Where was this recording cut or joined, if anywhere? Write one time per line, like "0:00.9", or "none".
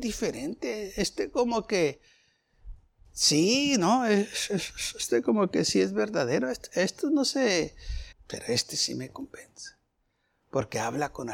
0:08.1